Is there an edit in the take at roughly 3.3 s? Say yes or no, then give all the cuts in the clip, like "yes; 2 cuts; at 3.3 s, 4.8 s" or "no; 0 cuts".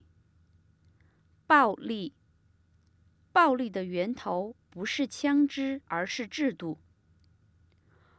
yes; 2 cuts; at 3.3 s, 5.8 s